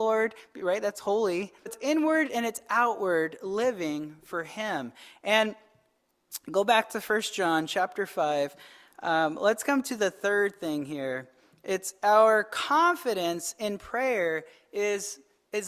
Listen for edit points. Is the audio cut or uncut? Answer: cut